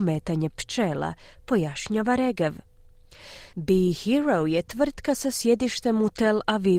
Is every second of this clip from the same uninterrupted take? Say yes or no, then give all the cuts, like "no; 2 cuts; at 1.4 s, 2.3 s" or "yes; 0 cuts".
no; 1 cut; at 3.5 s